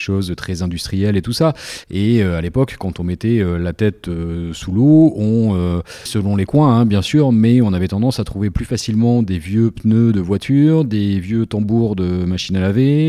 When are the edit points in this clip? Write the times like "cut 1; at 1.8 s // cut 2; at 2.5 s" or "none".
cut 1; at 1.8 s // cut 2; at 6.1 s